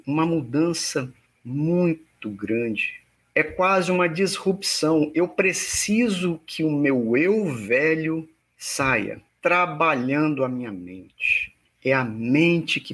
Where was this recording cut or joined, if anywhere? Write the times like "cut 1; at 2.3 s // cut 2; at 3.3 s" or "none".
cut 1; at 9.3 s